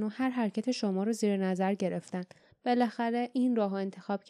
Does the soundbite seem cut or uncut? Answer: cut